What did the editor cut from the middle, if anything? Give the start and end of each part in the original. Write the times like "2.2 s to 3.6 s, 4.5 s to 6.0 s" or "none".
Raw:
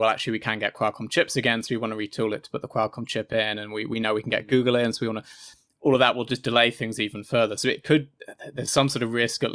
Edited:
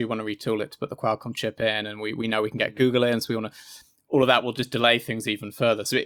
none

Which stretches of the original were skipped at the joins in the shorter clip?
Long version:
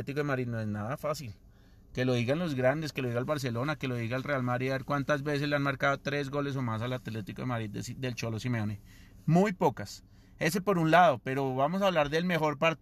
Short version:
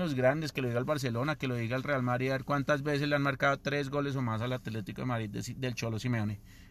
none

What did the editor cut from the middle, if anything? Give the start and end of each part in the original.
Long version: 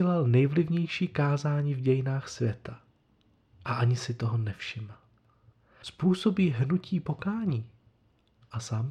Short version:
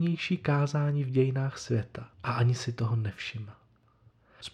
2.8 s to 3.6 s

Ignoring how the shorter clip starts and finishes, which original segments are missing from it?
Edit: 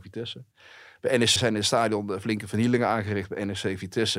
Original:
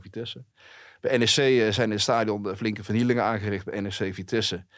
1.4 s to 1.7 s

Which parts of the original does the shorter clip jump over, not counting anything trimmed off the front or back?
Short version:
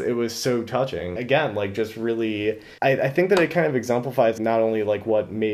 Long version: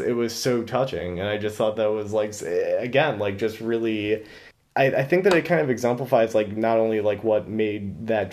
1.2 s to 2.8 s, 4.4 s to 4.7 s, 6.3 s to 6.5 s

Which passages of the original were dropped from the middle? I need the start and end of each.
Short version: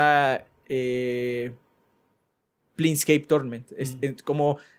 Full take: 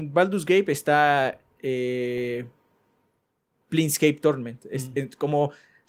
none

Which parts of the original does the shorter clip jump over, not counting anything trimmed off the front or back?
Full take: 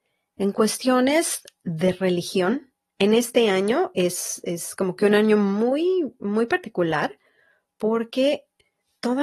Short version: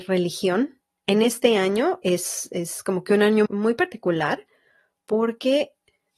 5.4 s to 6.2 s

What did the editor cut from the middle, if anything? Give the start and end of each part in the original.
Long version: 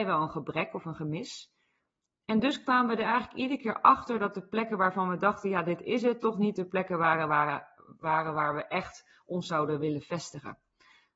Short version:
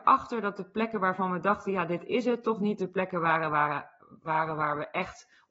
none

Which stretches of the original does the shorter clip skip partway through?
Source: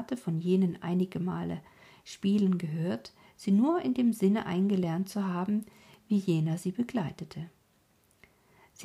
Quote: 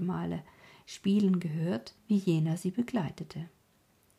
3.2 s to 6.0 s

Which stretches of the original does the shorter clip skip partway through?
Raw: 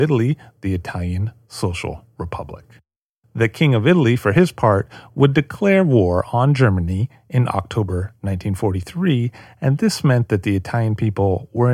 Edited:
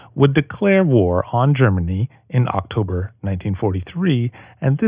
none

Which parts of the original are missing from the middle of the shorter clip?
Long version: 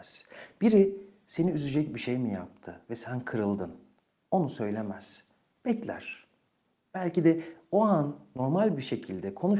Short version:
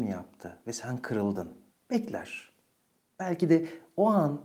3.9 s to 5.5 s

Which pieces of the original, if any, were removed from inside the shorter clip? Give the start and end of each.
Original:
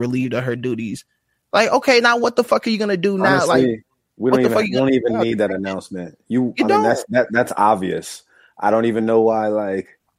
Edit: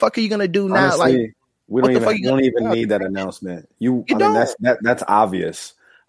none

